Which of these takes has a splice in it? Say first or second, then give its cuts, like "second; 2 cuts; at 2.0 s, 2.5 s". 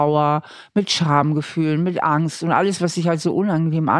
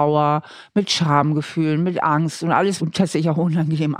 second; 1 cut; at 2.8 s